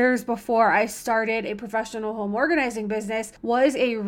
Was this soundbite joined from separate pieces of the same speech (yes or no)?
no